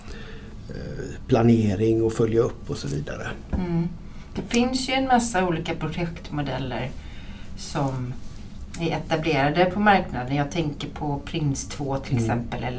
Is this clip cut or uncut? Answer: uncut